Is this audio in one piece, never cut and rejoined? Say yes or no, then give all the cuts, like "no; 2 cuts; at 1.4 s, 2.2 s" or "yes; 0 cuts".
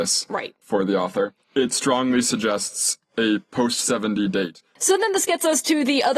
no; 1 cut; at 1.4 s